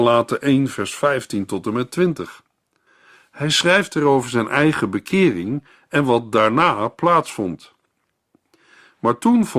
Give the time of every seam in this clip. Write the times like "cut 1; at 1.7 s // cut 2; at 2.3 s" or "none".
none